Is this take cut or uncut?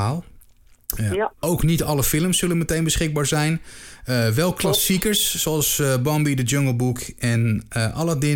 uncut